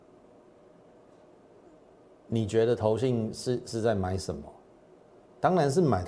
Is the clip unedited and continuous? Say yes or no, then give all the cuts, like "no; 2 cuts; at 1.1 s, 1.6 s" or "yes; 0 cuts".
yes; 0 cuts